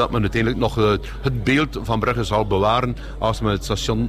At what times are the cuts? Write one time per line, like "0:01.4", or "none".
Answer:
none